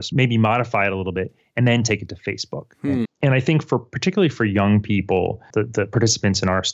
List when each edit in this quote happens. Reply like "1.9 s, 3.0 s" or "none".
3.1 s, 5.5 s